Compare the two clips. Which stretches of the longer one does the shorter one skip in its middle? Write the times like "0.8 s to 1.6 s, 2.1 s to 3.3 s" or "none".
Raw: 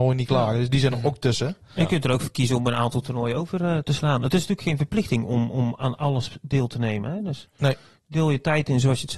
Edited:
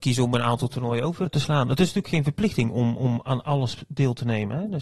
3.6 s to 3.8 s